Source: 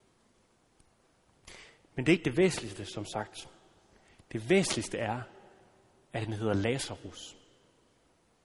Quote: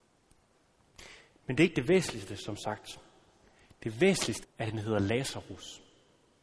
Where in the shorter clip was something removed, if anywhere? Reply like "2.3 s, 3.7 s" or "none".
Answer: 4.4 s